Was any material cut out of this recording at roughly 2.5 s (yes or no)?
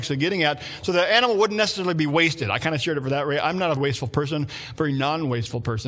no